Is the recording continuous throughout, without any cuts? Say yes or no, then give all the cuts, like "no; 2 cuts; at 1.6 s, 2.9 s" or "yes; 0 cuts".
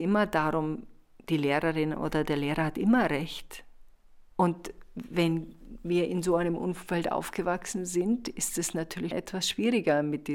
no; 2 cuts; at 4.3 s, 9.1 s